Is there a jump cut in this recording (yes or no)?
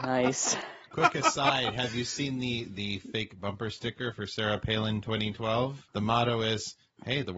yes